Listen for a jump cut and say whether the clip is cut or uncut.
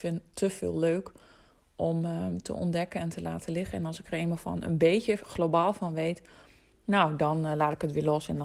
uncut